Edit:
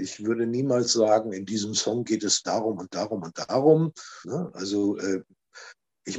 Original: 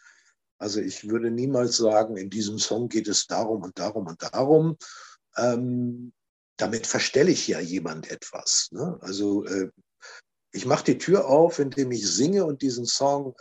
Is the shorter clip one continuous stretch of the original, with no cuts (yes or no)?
no